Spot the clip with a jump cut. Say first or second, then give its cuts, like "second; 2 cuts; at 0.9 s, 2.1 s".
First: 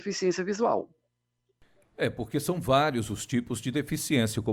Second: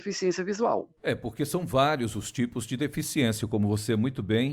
second; 1 cut; at 1.0 s